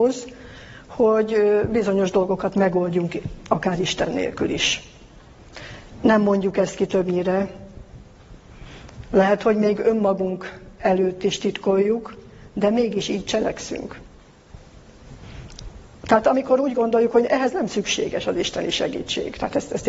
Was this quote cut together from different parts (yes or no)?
no